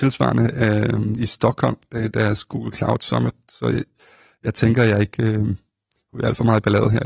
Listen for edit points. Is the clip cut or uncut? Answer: uncut